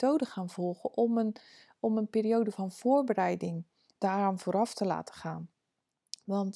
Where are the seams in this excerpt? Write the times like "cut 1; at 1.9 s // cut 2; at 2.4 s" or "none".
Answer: none